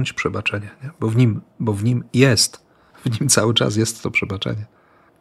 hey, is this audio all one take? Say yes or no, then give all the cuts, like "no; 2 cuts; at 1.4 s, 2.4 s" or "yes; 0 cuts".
yes; 0 cuts